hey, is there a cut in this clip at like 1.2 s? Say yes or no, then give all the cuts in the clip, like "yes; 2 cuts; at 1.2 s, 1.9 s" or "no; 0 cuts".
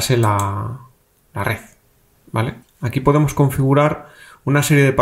no; 1 cut; at 2.6 s